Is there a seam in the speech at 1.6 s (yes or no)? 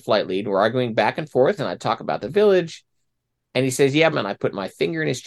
yes